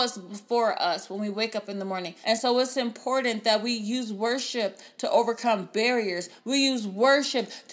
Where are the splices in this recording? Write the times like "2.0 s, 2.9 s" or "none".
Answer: 2.2 s, 6.4 s